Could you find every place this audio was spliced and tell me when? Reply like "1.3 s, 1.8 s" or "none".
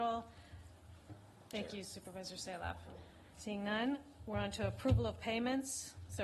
1.1 s, 3.3 s